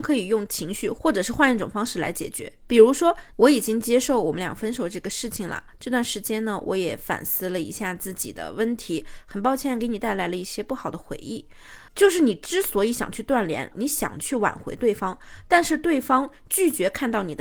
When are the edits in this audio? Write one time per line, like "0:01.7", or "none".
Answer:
0:03.3
0:11.9
0:13.7

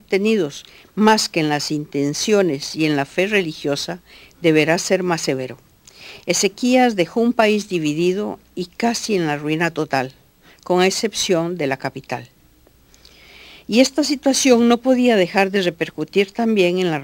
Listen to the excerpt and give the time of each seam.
none

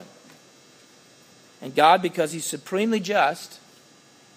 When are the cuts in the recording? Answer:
0:01.4

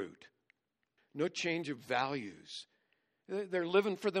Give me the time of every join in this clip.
0:01.0

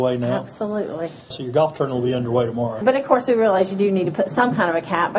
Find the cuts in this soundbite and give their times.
0:01.3
0:02.8

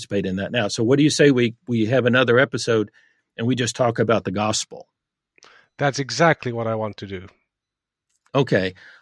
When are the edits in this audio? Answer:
none

